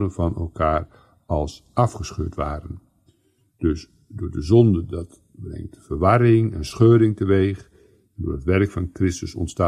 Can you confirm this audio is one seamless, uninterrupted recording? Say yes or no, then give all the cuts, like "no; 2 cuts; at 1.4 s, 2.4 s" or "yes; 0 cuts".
yes; 0 cuts